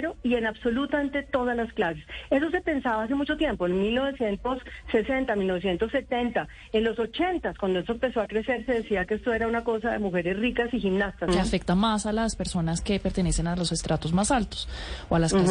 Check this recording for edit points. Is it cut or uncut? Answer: cut